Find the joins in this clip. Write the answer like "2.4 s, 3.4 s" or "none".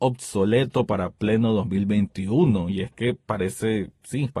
none